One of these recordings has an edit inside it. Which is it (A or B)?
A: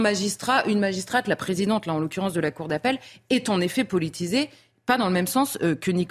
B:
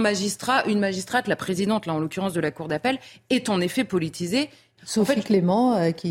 B